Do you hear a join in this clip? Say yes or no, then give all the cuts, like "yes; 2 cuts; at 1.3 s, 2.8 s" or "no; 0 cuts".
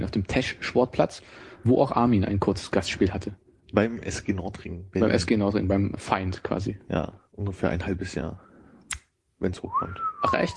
yes; 1 cut; at 6.0 s